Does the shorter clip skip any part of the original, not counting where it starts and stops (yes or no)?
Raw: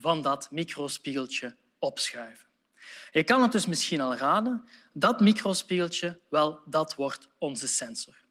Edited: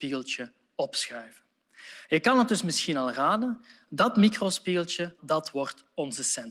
yes